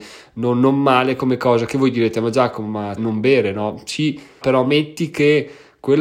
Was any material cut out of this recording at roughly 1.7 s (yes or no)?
no